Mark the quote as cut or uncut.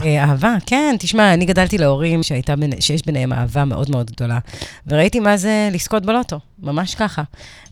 cut